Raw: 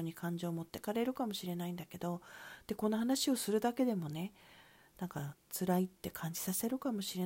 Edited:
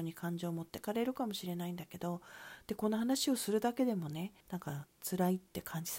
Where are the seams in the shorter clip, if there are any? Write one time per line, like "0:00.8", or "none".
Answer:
0:04.4